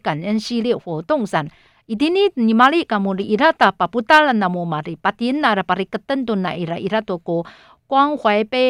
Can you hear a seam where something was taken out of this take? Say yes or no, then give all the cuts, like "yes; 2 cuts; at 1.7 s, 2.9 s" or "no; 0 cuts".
no; 0 cuts